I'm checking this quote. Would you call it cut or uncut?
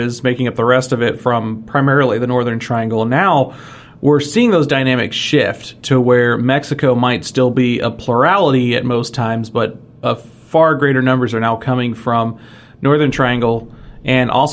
uncut